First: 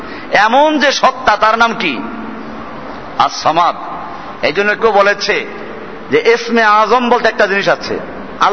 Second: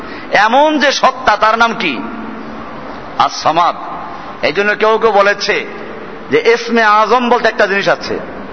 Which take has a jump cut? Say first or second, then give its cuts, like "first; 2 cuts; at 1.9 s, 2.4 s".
first; 1 cut; at 4.8 s